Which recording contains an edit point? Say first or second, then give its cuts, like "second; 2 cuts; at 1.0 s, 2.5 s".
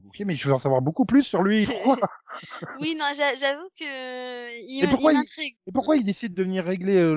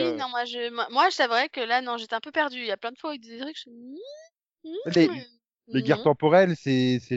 first; 2 cuts; at 1.6 s, 5.6 s